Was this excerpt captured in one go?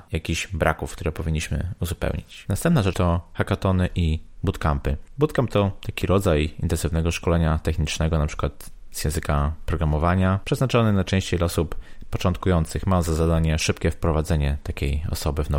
no; 1 cut; at 2.9 s

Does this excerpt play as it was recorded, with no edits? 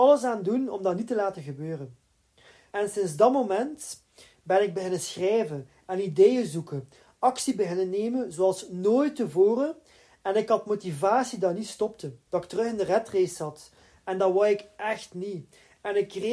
no; 2 cuts; at 2.7 s, 12.3 s

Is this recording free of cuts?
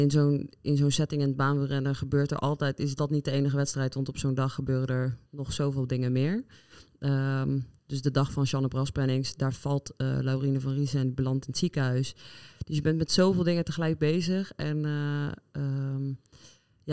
no; 1 cut; at 5.3 s

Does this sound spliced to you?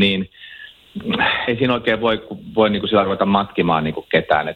yes; 1 cut; at 1.5 s

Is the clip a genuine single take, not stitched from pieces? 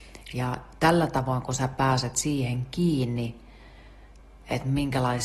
yes; 0 cuts

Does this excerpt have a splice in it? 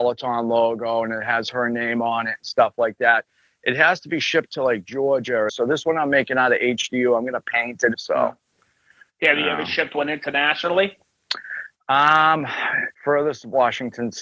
yes; 3 cuts; at 5.5 s, 7.9 s, 12.9 s

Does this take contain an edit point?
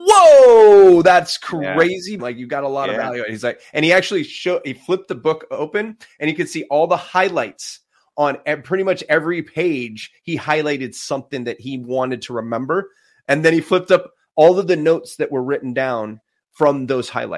yes; 1 cut; at 2.2 s

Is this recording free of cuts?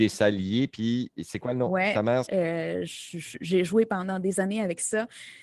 no; 1 cut; at 2.3 s

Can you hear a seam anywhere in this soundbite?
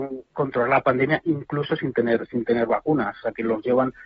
no; 0 cuts

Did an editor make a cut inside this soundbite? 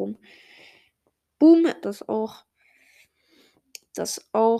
yes; 1 cut; at 1.8 s

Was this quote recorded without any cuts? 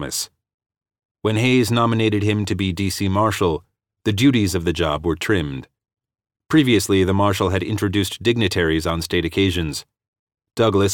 yes; 0 cuts

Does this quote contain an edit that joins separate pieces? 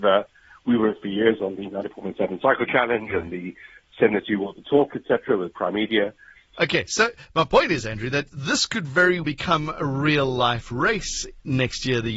yes; 2 cuts; at 6.5 s, 9.2 s

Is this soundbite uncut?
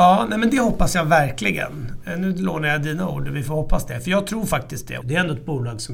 no; 1 cut; at 5.0 s

